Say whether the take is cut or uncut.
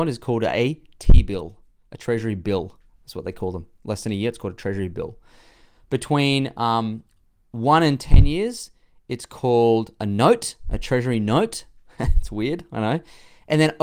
uncut